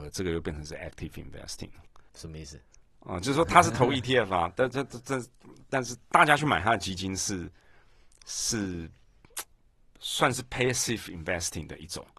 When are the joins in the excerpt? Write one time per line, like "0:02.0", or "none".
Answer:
0:02.1